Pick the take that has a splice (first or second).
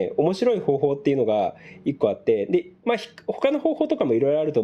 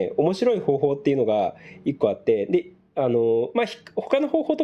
first